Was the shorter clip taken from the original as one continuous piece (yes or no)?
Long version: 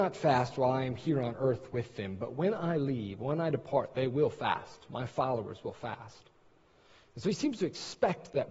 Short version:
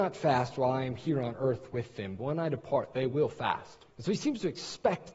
no